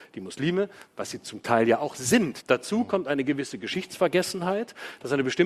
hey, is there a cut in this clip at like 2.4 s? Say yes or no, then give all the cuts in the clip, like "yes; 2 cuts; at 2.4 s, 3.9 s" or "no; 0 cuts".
yes; 1 cut; at 2.4 s